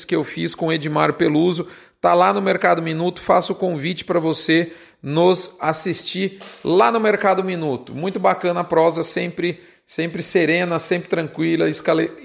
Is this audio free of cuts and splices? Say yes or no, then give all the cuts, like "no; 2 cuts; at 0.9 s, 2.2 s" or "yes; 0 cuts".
yes; 0 cuts